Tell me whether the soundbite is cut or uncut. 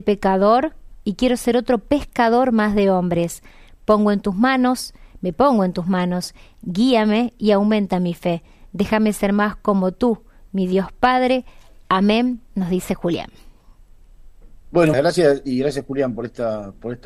cut